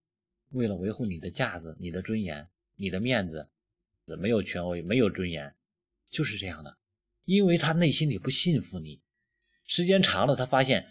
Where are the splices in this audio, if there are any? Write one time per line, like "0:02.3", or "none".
0:04.1

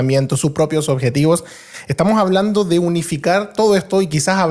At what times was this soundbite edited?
none

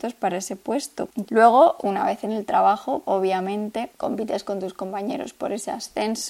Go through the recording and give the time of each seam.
0:01.3
0:03.0

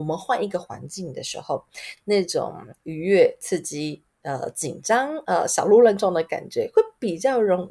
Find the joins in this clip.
none

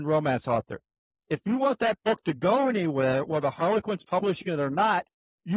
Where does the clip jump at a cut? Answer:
0:01.1

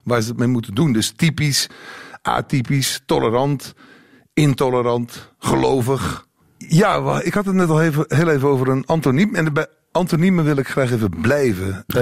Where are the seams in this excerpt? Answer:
0:06.4

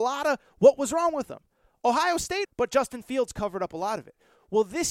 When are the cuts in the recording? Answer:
0:02.5

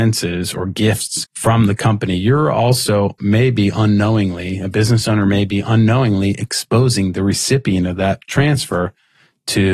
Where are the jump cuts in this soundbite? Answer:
0:01.2

